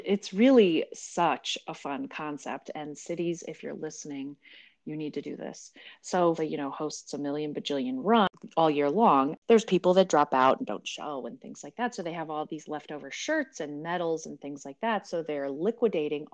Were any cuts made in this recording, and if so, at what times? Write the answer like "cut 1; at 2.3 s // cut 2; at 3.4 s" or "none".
cut 1; at 6.4 s